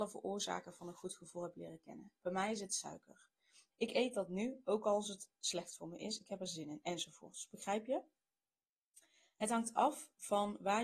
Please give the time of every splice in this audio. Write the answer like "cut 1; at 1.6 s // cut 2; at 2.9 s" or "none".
cut 1; at 3.7 s